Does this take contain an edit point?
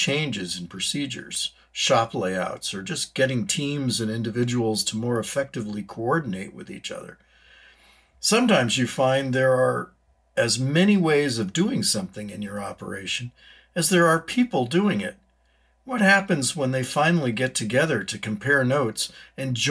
no; 0 cuts

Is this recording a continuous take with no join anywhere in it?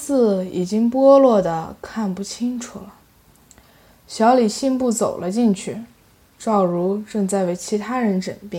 yes; 0 cuts

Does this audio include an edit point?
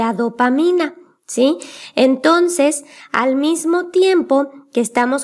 no; 0 cuts

